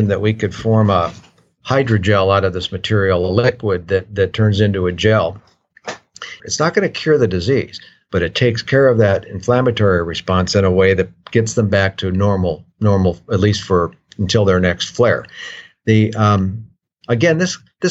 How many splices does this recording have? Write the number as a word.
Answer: two